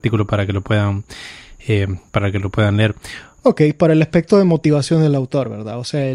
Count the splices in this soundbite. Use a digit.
1